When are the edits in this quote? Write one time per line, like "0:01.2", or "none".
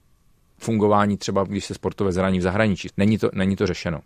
0:02.9

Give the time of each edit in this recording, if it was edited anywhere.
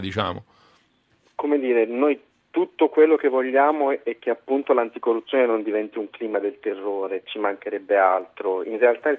none

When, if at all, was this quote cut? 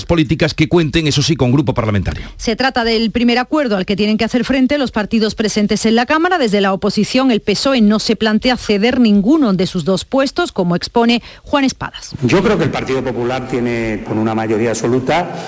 0:14.1

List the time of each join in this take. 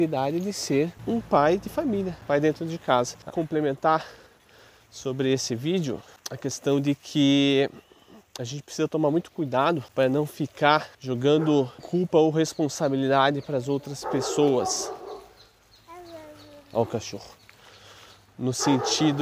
0:03.3

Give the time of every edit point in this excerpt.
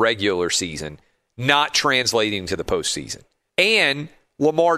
0:03.5

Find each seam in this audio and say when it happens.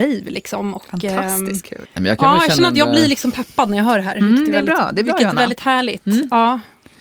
0:01.8

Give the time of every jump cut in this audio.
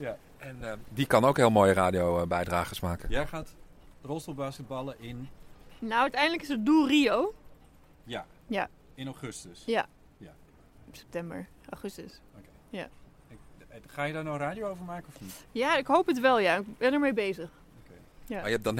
none

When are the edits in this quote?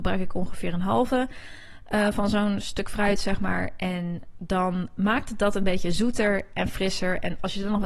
none

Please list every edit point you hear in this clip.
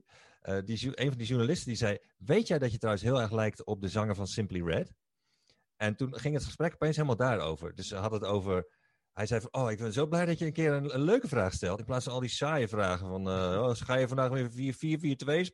none

